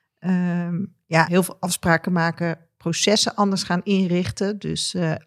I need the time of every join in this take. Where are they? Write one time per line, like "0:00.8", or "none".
0:01.3